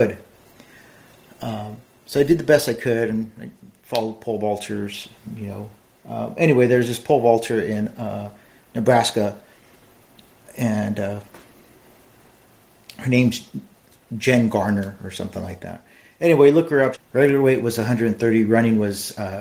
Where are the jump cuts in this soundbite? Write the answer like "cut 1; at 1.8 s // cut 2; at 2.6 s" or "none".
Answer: cut 1; at 16.9 s